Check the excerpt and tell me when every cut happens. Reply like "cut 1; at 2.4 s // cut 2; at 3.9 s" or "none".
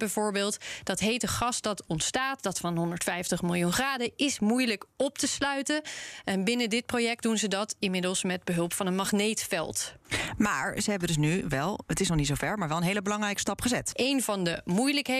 cut 1; at 13.9 s